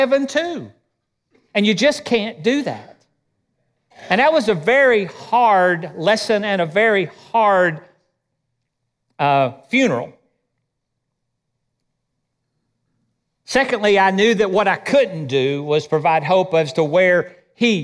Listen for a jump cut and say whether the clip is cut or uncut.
uncut